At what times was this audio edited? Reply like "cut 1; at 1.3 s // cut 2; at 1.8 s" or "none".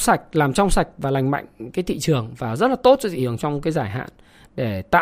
cut 1; at 3.4 s